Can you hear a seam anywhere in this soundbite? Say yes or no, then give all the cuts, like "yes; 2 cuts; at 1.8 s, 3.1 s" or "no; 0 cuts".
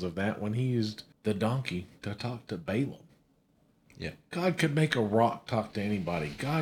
yes; 1 cut; at 1.1 s